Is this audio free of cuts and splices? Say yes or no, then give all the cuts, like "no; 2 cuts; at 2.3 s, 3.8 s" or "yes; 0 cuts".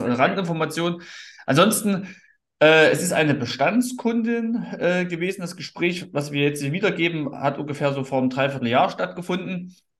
yes; 0 cuts